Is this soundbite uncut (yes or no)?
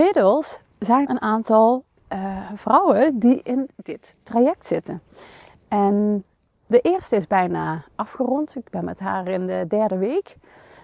no